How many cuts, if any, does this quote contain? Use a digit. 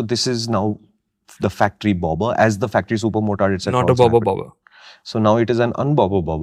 0